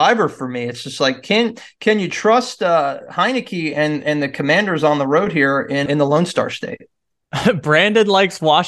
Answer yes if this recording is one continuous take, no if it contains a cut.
no